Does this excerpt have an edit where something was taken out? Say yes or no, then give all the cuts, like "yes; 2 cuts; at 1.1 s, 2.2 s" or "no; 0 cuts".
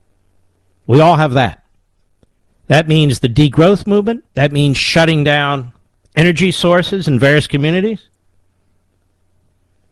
yes; 2 cuts; at 2.5 s, 4.3 s